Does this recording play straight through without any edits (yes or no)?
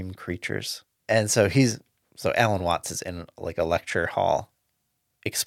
no